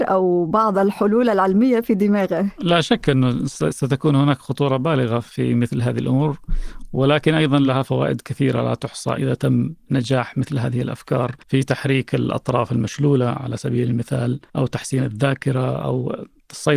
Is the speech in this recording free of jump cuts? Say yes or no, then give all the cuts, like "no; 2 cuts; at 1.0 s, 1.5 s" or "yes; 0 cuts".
no; 2 cuts; at 11.4 s, 14.5 s